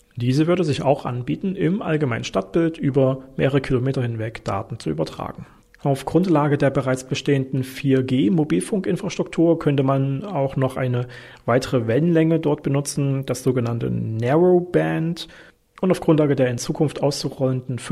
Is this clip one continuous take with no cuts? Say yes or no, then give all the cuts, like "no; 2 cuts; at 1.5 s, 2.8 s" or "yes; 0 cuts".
yes; 0 cuts